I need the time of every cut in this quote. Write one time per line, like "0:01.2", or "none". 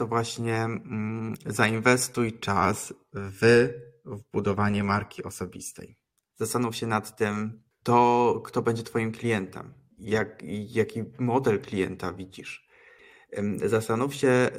0:06.3